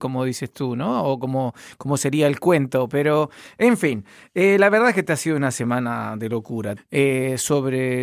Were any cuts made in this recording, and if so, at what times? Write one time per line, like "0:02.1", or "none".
0:06.8